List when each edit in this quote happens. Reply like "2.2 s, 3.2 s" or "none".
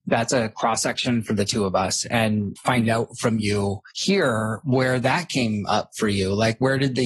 2.6 s, 3.9 s

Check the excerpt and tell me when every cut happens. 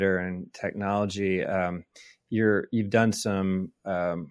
none

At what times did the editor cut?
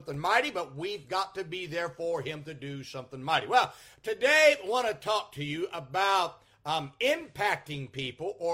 none

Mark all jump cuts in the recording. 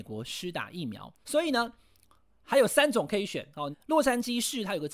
1.2 s, 3.7 s

